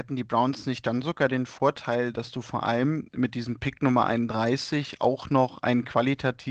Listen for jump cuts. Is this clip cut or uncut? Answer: uncut